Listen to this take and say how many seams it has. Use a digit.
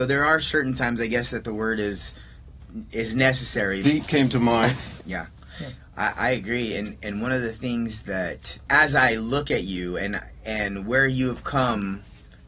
3